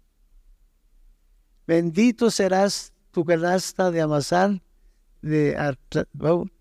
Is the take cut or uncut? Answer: cut